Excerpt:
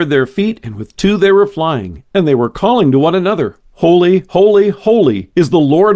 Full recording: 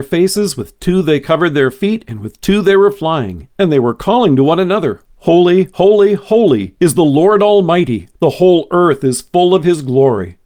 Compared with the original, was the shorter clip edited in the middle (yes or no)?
no